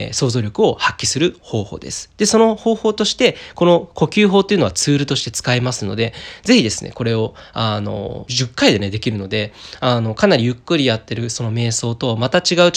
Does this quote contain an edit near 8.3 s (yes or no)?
yes